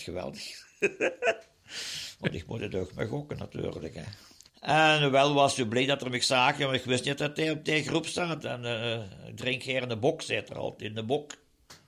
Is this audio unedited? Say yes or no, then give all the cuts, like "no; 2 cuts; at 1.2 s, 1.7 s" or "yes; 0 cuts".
no; 2 cuts; at 4.5 s, 8.4 s